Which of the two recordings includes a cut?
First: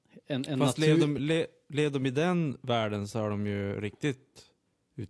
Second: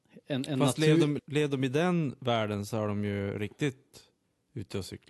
second; 1 cut; at 1.2 s

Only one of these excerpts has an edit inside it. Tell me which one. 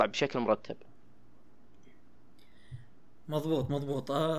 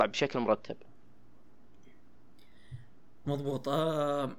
second; 1 cut; at 3.2 s

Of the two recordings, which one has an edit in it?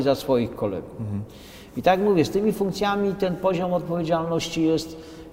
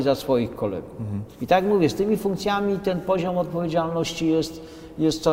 second; 1 cut; at 1.3 s

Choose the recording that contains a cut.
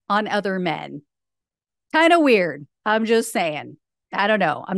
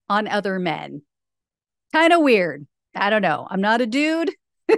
second; 1 cut; at 2.8 s

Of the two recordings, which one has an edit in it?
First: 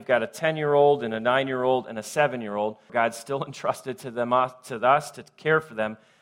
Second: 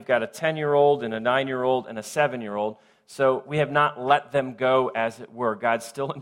first; 1 cut; at 2.9 s

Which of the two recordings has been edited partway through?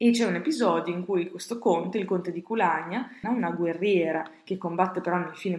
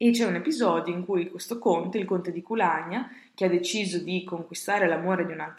first; 1 cut; at 3.2 s

